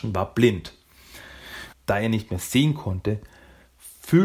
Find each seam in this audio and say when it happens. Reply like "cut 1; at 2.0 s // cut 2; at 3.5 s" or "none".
cut 1; at 1.7 s